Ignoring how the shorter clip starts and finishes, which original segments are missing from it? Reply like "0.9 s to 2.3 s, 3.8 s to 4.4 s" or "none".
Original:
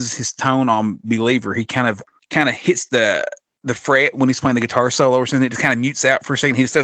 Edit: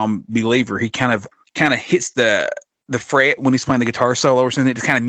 none